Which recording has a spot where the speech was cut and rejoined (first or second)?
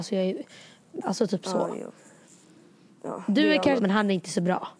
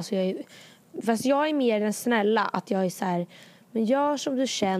first